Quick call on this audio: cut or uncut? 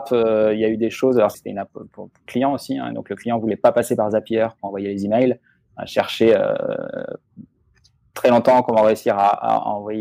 cut